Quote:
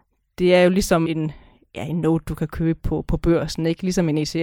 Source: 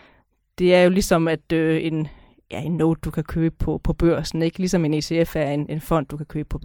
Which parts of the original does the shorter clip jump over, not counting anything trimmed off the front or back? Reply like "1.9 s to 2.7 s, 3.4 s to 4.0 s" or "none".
1.3 s to 1.8 s